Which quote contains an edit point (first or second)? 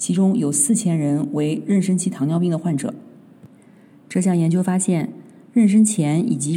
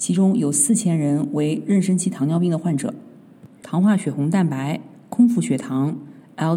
second